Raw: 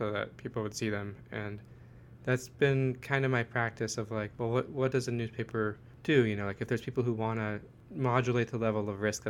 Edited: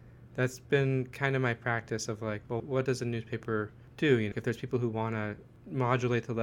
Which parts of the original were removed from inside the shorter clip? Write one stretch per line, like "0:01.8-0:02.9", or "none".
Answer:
0:04.5-0:04.7
0:06.4-0:06.6